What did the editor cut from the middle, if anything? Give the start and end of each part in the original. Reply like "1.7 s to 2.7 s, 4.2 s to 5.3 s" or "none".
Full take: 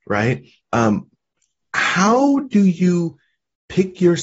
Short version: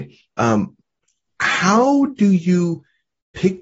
none